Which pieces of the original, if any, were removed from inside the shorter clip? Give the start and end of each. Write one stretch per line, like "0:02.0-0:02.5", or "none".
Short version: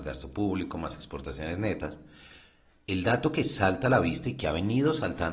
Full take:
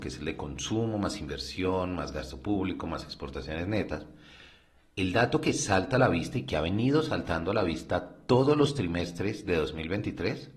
none